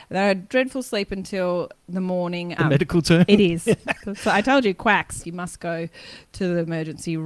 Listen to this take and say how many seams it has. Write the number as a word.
three